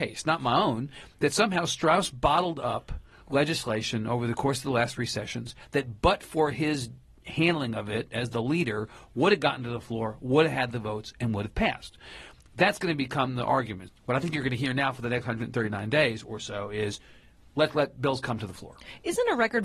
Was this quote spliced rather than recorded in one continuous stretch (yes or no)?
yes